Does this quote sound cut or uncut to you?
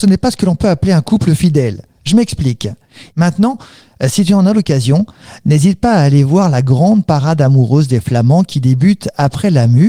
cut